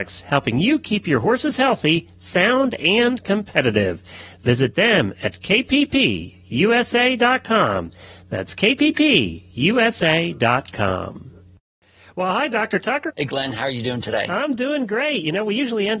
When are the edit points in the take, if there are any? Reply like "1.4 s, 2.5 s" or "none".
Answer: 13.1 s